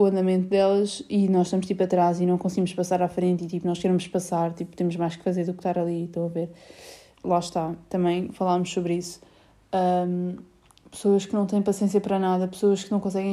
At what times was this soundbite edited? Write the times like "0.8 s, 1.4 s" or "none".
7.2 s